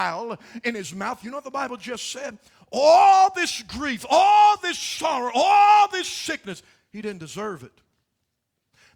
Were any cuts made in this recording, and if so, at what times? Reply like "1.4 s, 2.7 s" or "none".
none